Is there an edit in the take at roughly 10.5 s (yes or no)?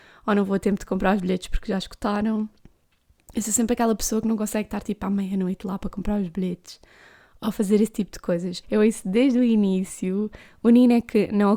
no